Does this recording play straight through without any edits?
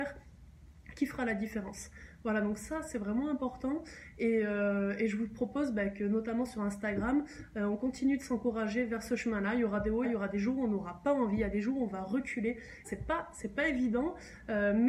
no; 2 cuts; at 10.0 s, 12.8 s

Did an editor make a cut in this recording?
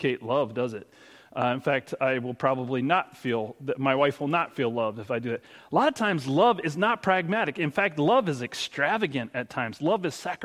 no; 0 cuts

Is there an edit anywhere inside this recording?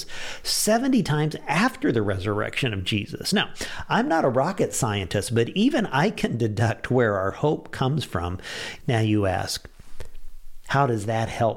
yes; 1 cut; at 8.8 s

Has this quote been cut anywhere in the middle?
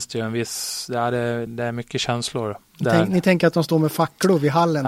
yes; 1 cut; at 1.5 s

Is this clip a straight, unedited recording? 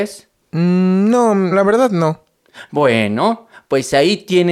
no; 1 cut; at 1.5 s

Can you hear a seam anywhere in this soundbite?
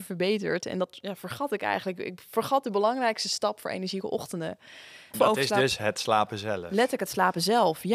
yes; 1 cut; at 5.1 s

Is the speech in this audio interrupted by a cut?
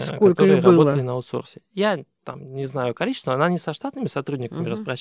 no; 0 cuts

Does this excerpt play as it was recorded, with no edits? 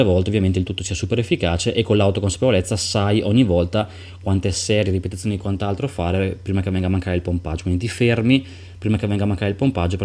yes; 0 cuts

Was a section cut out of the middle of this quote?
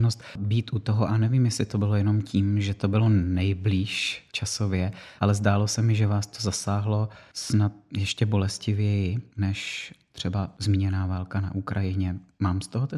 no; 0 cuts

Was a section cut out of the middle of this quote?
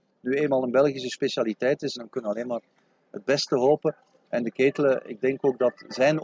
yes; 1 cut; at 2.0 s

